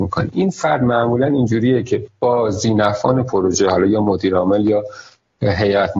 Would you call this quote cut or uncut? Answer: uncut